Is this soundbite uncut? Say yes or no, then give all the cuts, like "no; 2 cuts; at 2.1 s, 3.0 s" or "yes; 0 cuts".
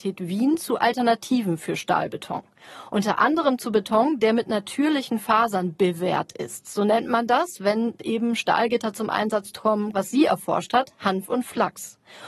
no; 1 cut; at 9.9 s